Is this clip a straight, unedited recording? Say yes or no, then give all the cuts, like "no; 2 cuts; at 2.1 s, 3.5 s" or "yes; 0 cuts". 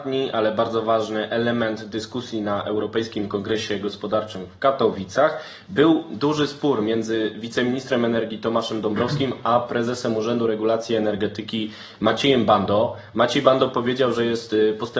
yes; 0 cuts